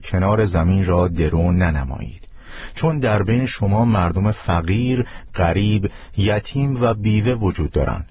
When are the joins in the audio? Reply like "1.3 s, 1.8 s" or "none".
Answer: 5.3 s

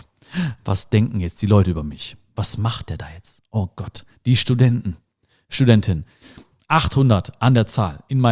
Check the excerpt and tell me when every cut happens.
none

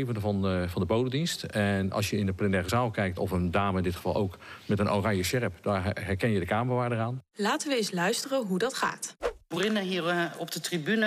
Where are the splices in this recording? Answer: 3.2 s

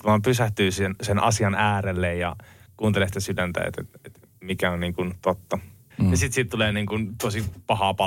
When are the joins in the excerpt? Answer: 5.9 s

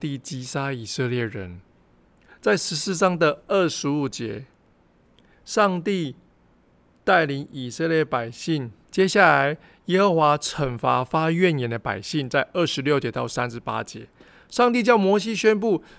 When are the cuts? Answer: 8.8 s

